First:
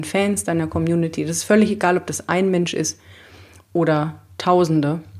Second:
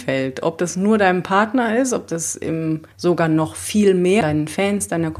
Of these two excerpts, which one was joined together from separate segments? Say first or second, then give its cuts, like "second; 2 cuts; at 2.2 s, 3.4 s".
second; 2 cuts; at 2.9 s, 4.2 s